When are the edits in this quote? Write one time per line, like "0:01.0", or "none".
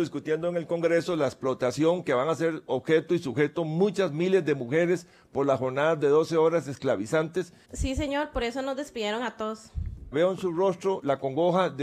0:07.6
0:10.1